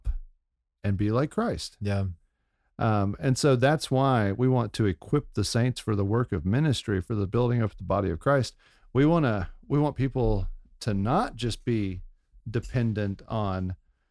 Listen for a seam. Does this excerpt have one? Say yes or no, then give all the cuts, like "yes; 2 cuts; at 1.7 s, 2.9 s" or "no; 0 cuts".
no; 0 cuts